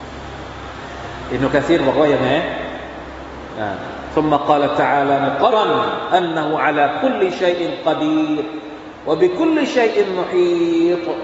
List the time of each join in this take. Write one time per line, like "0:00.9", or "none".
0:05.5